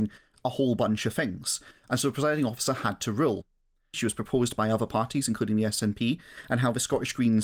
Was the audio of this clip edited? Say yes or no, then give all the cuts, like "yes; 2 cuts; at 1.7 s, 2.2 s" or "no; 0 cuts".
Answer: yes; 1 cut; at 3.9 s